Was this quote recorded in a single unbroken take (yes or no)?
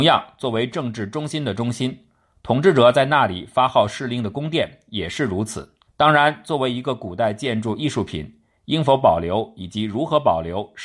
no